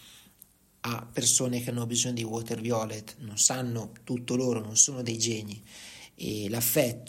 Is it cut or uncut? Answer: uncut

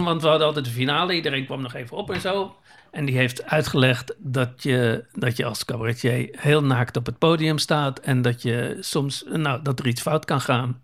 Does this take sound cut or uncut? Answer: cut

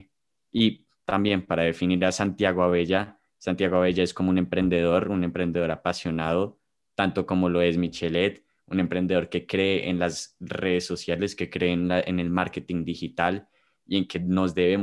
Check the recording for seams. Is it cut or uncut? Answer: uncut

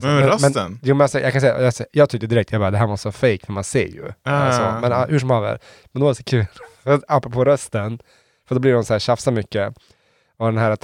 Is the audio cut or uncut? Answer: uncut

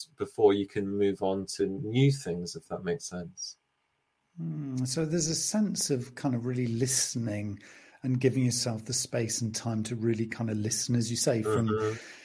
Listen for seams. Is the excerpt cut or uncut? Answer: uncut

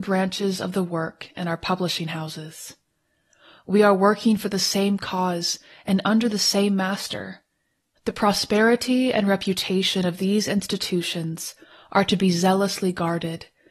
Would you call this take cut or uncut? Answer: cut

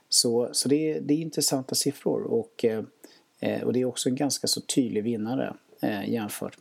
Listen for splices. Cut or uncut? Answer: uncut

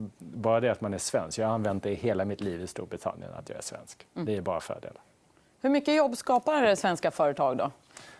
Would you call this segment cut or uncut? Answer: uncut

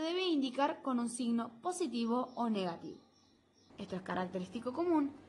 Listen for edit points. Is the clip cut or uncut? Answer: cut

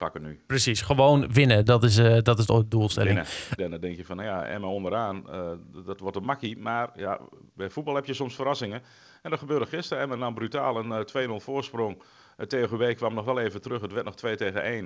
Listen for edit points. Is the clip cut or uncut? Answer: cut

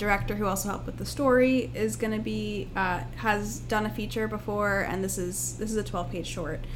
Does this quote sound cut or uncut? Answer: uncut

